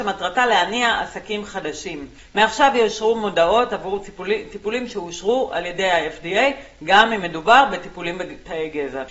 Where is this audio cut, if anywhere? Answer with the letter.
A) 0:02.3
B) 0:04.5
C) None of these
A